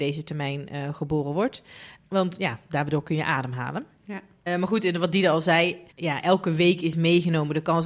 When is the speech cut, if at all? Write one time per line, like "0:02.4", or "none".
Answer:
0:04.5
0:05.9